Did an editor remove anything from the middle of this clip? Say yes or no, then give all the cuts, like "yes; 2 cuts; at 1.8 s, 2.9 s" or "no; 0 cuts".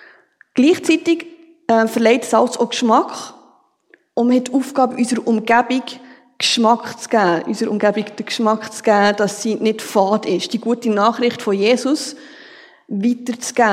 no; 0 cuts